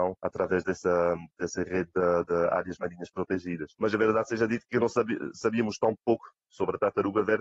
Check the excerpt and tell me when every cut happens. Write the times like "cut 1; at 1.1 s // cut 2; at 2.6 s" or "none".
none